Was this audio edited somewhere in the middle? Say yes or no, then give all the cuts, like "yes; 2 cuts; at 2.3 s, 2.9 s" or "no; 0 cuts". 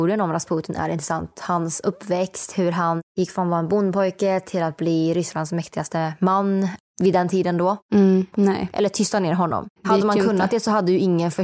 yes; 1 cut; at 8.3 s